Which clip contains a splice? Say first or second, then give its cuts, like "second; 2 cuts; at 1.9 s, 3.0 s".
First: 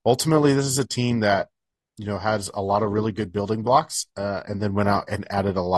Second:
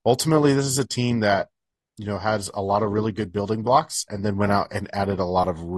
second; 1 cut; at 4.1 s